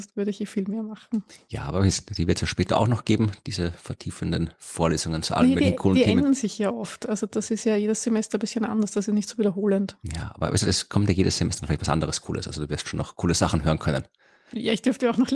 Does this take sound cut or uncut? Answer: uncut